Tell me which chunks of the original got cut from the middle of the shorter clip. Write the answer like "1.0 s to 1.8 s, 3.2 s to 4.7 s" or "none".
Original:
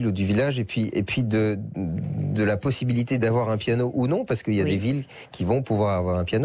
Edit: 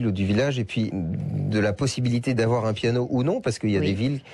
0.9 s to 1.7 s